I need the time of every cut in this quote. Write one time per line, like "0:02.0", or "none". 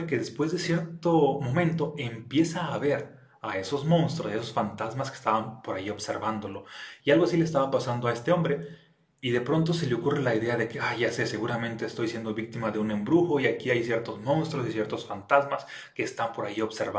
0:07.0